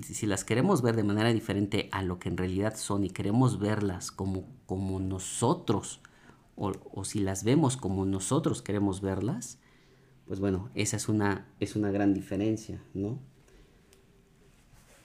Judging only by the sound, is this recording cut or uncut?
uncut